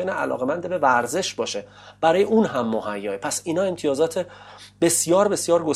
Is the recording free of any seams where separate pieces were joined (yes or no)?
yes